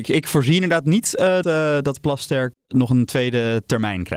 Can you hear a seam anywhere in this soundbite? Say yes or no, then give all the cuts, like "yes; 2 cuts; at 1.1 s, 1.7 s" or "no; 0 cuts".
yes; 2 cuts; at 1.4 s, 2.5 s